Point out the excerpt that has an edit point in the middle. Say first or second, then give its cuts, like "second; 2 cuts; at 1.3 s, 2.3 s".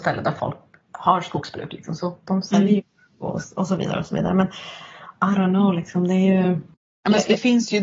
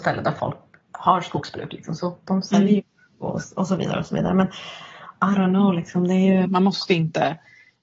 second; 1 cut; at 6.4 s